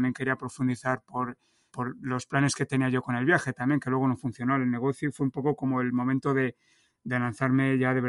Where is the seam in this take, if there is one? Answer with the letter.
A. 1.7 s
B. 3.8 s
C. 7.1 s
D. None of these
A